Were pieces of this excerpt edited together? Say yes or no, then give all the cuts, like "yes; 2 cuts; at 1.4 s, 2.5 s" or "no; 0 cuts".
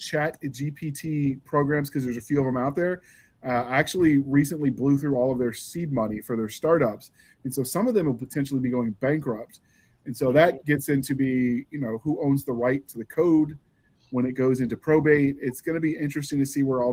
no; 0 cuts